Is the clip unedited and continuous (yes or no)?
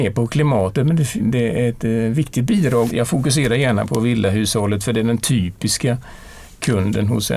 no